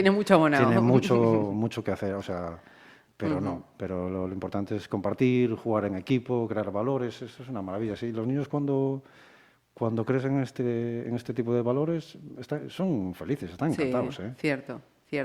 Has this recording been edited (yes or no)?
no